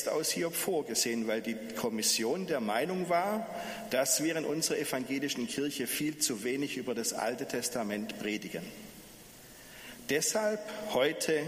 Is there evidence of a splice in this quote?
no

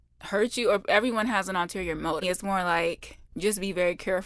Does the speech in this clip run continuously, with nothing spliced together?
no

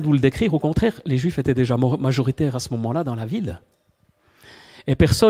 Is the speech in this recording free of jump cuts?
yes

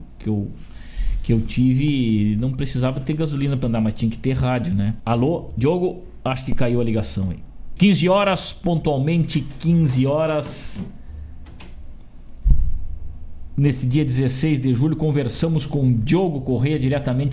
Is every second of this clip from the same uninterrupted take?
no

